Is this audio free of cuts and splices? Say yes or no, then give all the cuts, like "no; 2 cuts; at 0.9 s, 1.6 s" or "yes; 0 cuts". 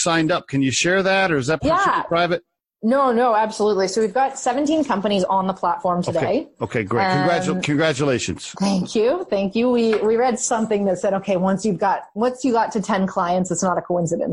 yes; 0 cuts